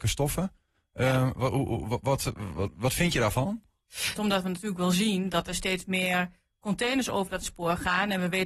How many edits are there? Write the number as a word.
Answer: one